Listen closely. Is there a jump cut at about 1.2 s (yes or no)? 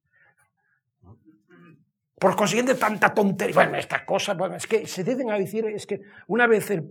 no